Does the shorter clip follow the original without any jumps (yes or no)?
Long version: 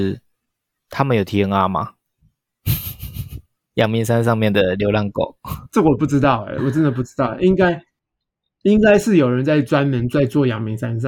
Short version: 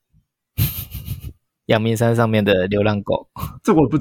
yes